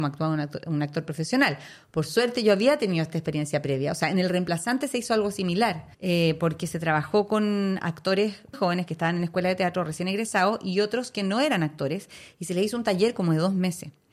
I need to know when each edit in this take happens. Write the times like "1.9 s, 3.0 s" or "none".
5.9 s, 8.5 s